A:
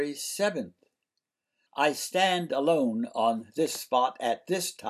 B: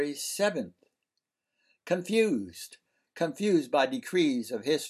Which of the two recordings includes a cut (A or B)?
A